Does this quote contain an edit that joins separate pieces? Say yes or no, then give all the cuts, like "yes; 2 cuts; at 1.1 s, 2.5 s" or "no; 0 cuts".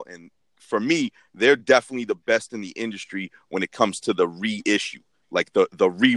no; 0 cuts